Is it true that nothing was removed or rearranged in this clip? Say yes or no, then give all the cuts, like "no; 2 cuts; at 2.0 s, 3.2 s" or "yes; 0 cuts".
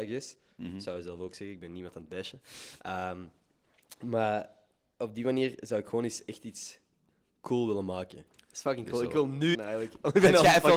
no; 2 cuts; at 8.3 s, 9.5 s